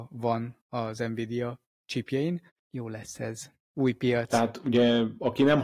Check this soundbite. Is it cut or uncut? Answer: uncut